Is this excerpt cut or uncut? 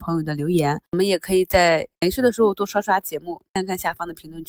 uncut